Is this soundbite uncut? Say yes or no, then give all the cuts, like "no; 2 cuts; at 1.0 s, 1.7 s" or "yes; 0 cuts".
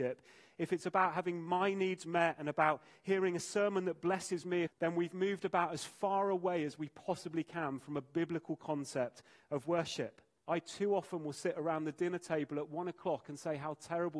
no; 2 cuts; at 4.7 s, 10.4 s